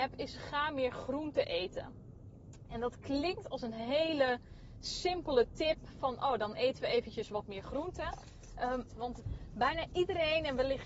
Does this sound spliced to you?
yes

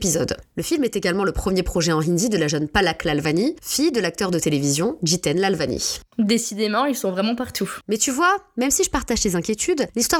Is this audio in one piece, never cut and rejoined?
yes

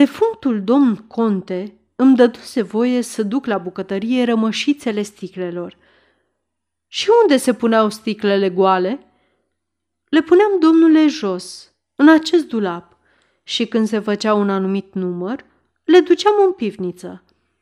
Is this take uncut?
yes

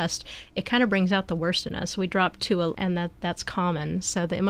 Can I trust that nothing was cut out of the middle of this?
no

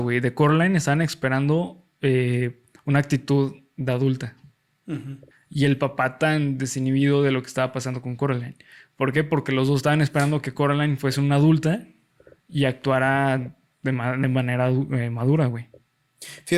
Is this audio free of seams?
no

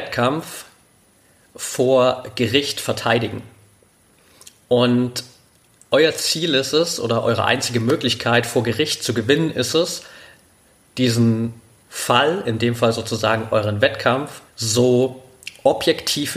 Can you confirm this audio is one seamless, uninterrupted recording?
no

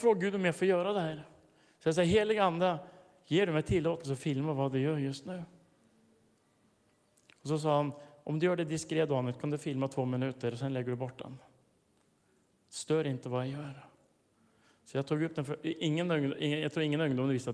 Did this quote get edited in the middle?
no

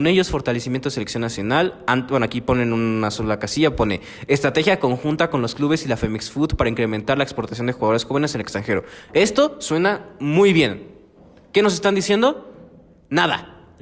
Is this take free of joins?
yes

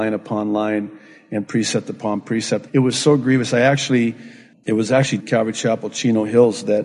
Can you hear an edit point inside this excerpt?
yes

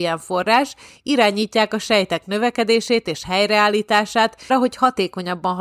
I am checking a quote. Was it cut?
yes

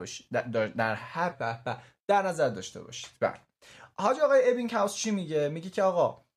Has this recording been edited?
yes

